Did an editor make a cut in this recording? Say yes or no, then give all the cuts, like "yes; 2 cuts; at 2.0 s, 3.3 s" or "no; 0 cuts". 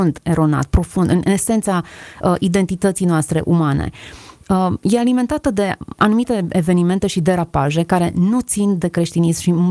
no; 0 cuts